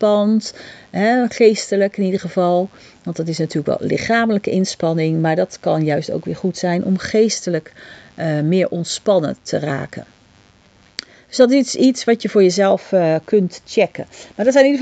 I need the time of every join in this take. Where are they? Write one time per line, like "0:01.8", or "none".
none